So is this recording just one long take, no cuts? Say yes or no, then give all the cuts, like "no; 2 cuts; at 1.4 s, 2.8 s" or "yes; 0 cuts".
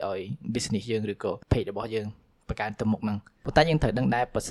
no; 1 cut; at 1.4 s